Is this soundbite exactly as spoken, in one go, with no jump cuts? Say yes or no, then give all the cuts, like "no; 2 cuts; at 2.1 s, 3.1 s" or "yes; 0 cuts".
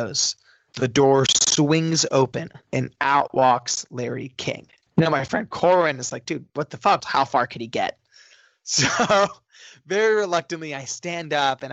no; 2 cuts; at 4.9 s, 7.0 s